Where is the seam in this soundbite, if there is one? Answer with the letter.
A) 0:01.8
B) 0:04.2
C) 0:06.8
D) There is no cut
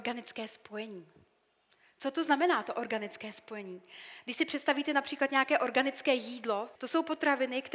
C